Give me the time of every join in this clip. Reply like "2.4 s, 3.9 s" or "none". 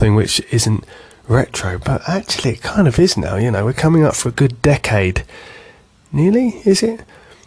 none

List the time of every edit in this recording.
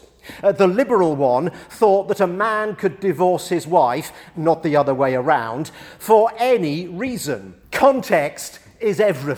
4.3 s, 7.6 s

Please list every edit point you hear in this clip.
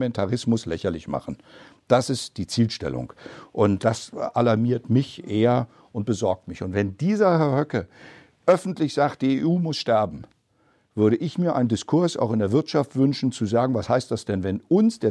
3.8 s

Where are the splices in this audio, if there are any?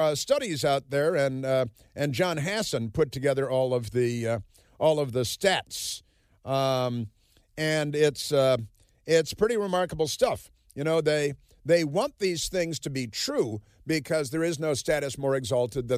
none

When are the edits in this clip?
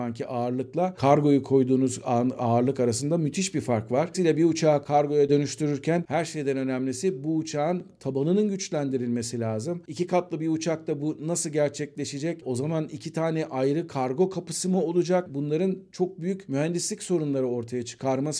none

